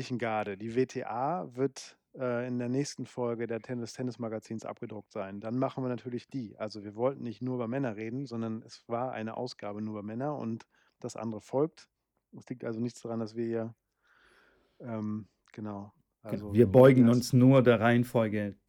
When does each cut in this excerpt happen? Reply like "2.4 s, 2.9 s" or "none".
none